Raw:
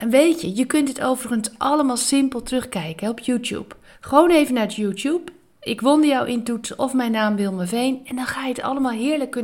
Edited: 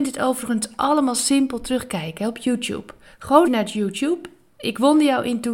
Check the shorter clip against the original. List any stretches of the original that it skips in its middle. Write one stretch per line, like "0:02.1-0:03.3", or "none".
0:04.3-0:04.5